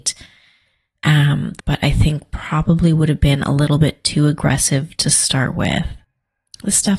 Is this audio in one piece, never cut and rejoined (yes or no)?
no